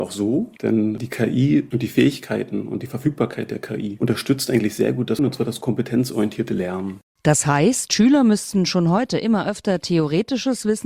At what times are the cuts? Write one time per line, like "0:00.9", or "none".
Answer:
0:05.2